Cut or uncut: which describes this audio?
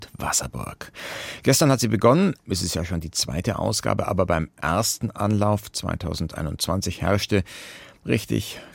cut